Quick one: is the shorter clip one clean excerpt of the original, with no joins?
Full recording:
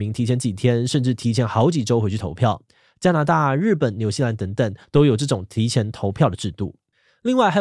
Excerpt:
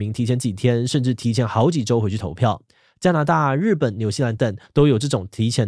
no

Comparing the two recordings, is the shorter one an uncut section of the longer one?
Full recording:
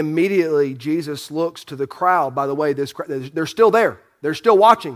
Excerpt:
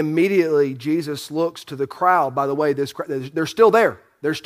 yes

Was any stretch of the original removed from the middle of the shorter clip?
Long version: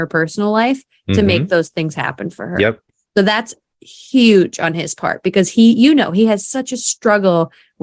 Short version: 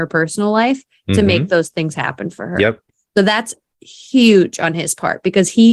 no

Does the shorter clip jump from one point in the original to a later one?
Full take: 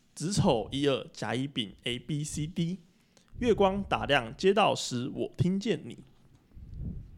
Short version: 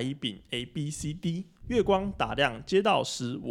yes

